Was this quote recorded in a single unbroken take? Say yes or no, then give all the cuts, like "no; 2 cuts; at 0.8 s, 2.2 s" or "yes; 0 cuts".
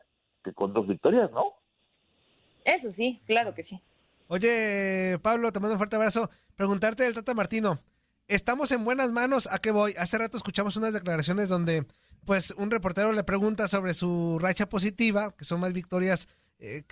yes; 0 cuts